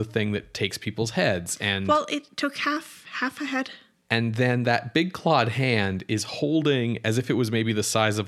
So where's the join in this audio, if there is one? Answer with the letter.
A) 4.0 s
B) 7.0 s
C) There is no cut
A